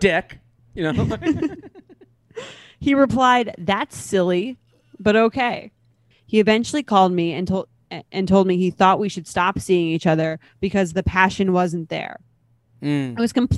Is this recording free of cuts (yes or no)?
no